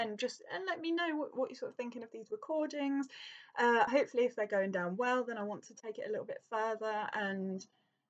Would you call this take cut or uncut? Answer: uncut